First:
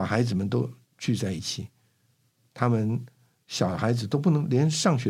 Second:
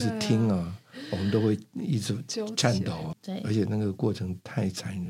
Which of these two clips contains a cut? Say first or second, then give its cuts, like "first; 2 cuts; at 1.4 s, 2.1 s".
second; 1 cut; at 3.1 s